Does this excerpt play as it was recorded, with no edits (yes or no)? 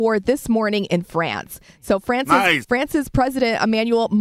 no